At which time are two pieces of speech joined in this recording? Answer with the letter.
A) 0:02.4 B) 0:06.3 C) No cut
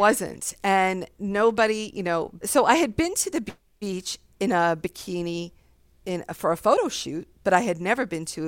A